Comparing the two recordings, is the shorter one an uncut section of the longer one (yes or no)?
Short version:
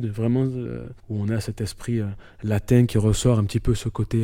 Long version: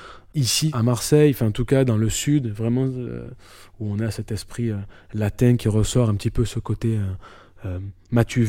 no